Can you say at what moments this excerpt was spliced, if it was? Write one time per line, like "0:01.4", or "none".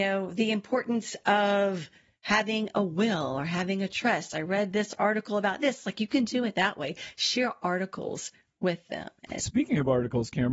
0:09.4